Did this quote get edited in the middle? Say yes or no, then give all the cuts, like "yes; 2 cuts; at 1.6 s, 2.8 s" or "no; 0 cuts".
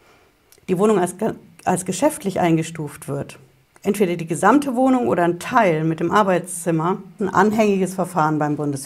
yes; 1 cut; at 7.2 s